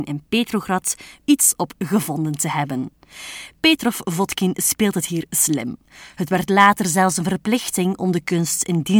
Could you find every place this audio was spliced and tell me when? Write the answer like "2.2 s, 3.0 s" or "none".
1.2 s, 6.1 s